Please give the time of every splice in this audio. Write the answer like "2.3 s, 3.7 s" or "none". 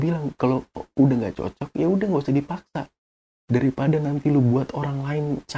none